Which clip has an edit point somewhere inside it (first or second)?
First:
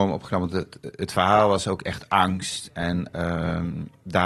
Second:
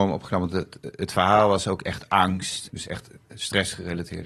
second